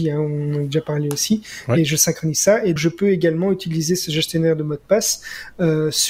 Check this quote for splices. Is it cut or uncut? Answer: cut